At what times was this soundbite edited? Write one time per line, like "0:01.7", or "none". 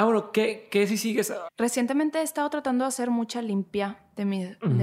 0:01.5